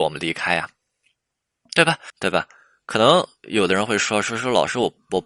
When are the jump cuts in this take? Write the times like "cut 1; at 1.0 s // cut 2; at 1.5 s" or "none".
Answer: cut 1; at 2.1 s